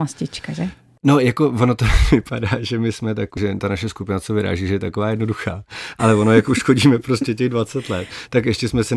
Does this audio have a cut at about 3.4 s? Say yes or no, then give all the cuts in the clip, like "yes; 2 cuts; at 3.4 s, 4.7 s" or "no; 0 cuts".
yes; 1 cut; at 3.4 s